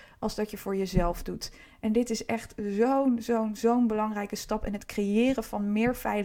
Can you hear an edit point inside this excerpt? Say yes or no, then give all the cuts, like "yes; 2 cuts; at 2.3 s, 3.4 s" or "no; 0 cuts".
no; 0 cuts